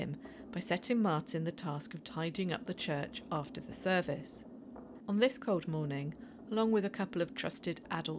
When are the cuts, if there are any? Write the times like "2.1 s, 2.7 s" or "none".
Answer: 5.0 s, 6.5 s